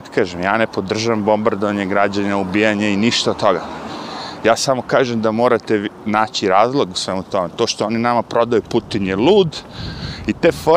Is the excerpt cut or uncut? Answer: uncut